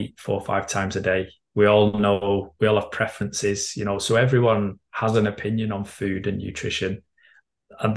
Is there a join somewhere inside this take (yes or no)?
no